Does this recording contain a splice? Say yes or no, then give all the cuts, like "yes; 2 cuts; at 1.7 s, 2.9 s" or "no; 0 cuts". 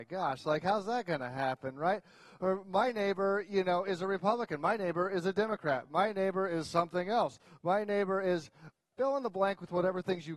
no; 0 cuts